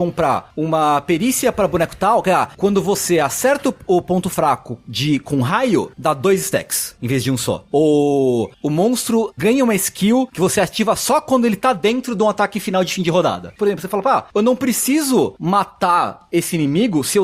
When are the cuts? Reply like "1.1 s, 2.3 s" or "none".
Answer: 13.6 s